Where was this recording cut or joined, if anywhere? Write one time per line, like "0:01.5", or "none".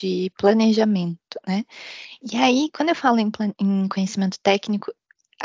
none